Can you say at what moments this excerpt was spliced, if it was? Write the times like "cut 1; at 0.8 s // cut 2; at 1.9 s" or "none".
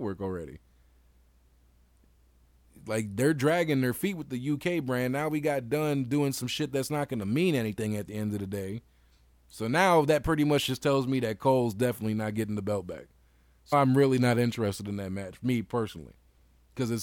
cut 1; at 13.7 s